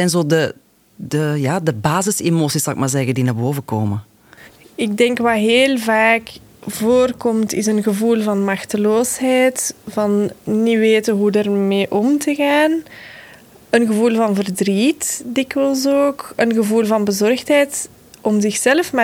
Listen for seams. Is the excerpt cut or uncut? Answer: uncut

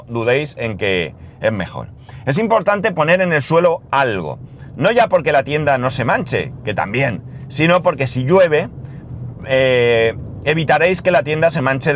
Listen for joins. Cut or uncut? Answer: uncut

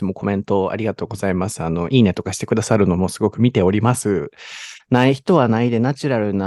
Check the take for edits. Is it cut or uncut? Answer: cut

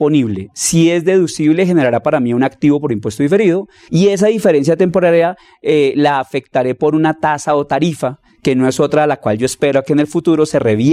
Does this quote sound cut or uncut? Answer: cut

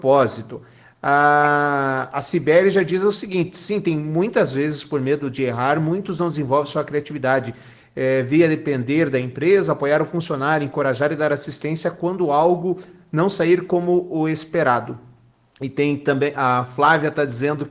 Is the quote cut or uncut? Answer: uncut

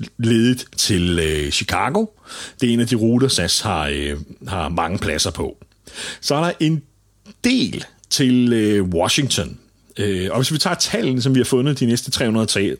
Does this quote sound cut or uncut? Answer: uncut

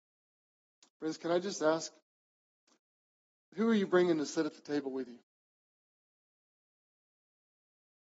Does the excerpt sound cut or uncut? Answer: uncut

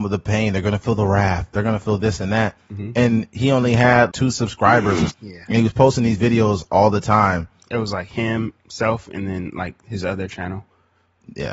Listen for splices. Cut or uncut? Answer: cut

